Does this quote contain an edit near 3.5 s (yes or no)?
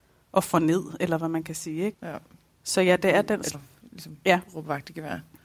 yes